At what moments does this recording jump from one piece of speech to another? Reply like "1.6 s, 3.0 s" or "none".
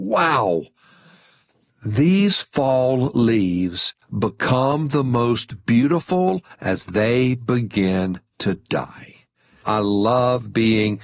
9.6 s

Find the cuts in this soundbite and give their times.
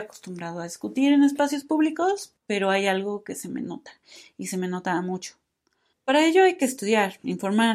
2.4 s, 5.9 s

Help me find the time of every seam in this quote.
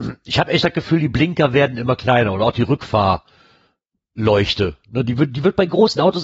none

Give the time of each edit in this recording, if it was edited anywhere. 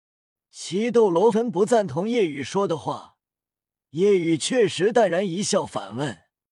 1.3 s

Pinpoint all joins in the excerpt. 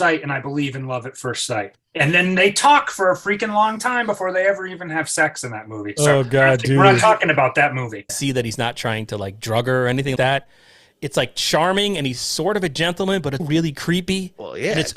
8.1 s, 10.2 s, 13.4 s

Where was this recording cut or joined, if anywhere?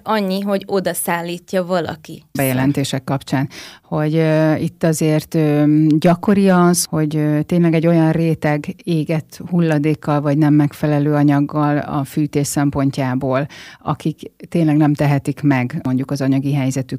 2.3 s

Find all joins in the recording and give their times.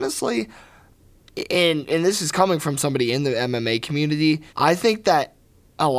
4.5 s

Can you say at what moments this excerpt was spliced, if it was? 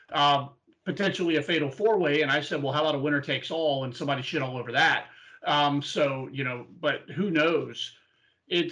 none

